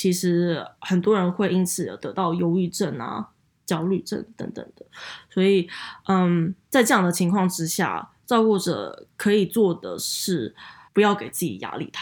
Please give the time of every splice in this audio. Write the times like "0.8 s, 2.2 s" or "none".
10.9 s

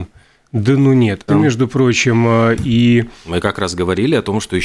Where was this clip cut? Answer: 1.3 s

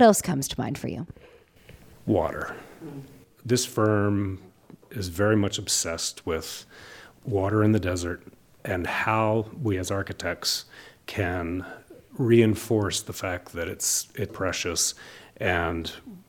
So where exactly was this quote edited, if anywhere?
14.3 s

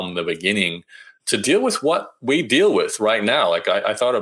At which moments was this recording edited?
1.2 s

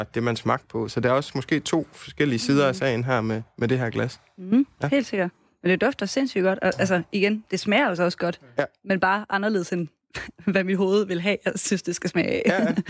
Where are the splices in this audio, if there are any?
none

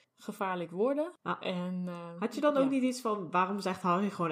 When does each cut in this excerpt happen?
1.2 s

